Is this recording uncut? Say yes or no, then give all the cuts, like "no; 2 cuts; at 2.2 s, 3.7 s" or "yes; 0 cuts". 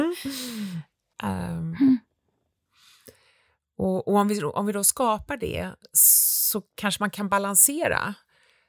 no; 1 cut; at 1.1 s